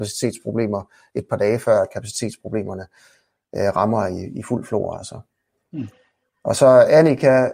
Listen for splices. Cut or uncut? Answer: uncut